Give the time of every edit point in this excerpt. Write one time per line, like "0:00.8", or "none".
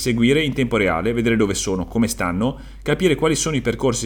none